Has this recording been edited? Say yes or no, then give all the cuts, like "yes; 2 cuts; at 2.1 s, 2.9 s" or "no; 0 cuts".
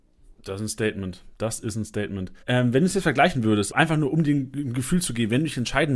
yes; 2 cuts; at 2.4 s, 3.7 s